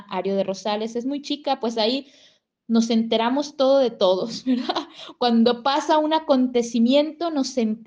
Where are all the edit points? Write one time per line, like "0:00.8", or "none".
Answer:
none